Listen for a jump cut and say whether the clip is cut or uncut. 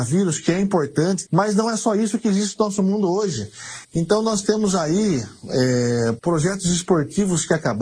cut